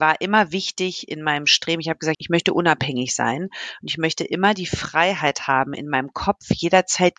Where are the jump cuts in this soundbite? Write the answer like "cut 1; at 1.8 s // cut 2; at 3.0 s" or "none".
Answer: cut 1; at 2.1 s